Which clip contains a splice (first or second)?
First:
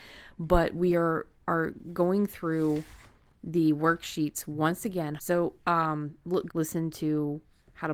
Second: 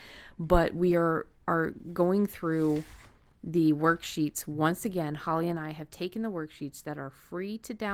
first